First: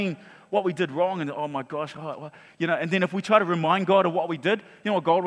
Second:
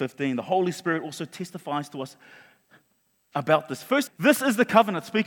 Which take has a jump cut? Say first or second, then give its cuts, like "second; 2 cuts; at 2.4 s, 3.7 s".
second; 1 cut; at 4.1 s